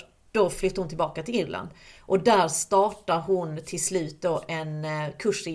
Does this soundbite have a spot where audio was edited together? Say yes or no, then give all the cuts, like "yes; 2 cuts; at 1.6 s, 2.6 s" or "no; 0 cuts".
no; 0 cuts